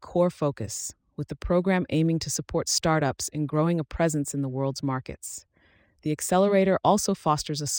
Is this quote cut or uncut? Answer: uncut